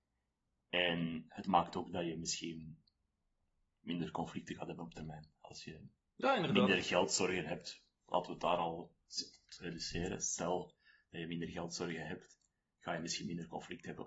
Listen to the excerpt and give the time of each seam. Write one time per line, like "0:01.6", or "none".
none